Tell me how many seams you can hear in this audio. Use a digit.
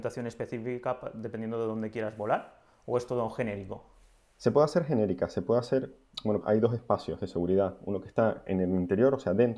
1